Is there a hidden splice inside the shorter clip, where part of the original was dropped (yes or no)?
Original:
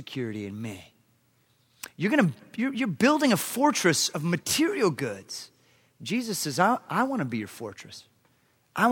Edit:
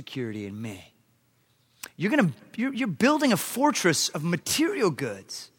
no